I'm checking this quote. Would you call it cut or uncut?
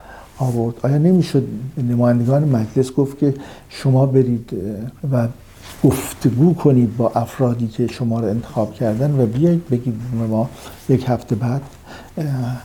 cut